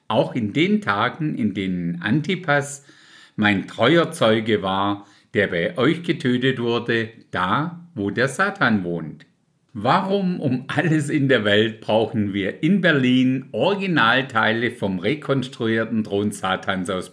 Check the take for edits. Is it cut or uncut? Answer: uncut